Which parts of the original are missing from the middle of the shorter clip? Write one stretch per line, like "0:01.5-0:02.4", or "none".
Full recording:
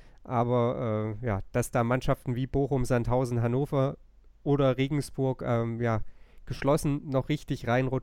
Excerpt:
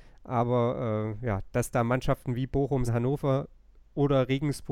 0:02.9-0:03.3